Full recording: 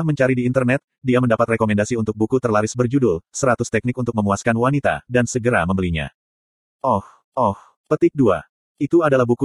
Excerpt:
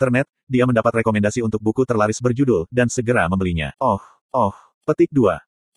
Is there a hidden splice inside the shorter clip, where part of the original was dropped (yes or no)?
yes